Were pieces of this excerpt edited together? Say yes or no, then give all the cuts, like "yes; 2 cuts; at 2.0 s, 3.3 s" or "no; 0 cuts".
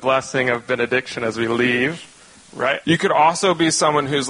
yes; 1 cut; at 2.8 s